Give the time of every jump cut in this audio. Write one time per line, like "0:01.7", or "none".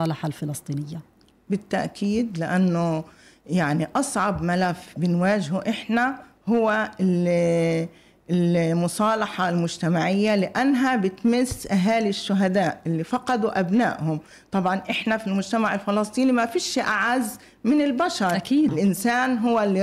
0:18.7